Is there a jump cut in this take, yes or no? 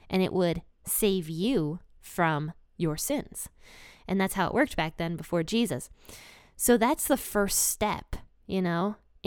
no